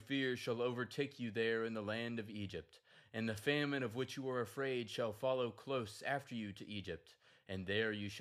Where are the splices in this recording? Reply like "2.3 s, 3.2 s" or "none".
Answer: none